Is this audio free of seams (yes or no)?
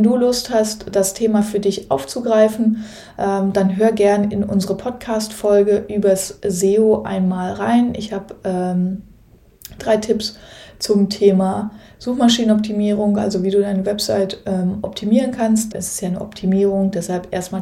no